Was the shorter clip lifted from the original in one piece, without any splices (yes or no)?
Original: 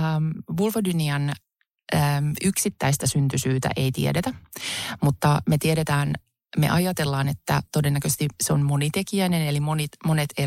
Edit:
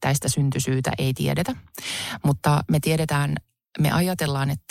yes